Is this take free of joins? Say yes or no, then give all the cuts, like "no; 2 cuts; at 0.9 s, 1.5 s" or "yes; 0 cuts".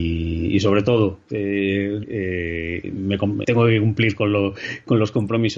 no; 2 cuts; at 2.0 s, 3.4 s